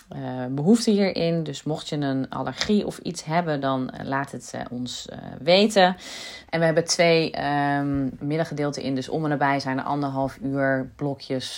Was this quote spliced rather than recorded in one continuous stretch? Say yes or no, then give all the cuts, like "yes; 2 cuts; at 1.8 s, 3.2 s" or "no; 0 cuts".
yes; 2 cuts; at 6.5 s, 8.2 s